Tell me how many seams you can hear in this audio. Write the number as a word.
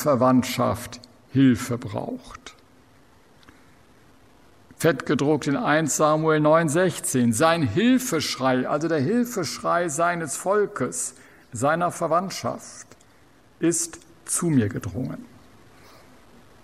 zero